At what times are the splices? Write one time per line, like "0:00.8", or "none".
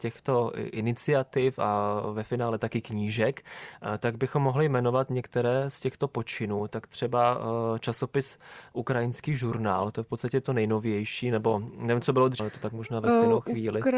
0:12.4